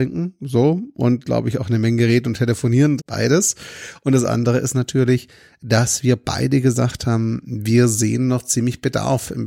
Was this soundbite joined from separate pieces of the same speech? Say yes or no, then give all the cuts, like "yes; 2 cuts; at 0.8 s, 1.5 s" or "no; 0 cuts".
yes; 1 cut; at 3.0 s